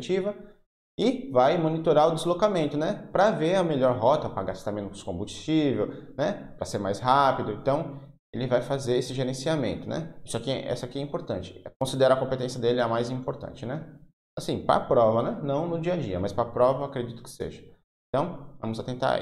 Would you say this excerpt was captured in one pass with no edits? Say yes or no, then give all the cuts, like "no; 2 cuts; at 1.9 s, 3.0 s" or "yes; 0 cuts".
yes; 0 cuts